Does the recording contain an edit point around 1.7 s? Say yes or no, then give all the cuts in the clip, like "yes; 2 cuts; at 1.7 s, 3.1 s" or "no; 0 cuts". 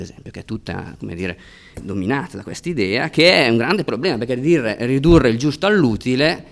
yes; 1 cut; at 1.7 s